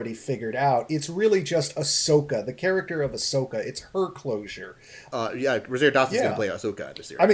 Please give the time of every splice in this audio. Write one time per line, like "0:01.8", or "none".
0:05.1